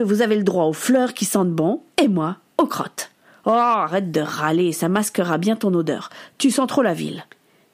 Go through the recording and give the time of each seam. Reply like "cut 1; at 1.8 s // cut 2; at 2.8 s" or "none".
none